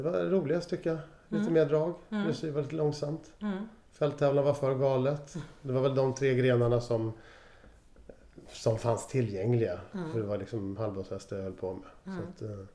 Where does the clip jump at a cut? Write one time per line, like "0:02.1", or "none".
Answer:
0:08.4